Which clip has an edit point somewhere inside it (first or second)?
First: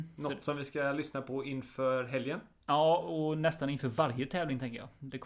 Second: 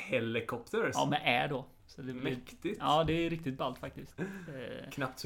second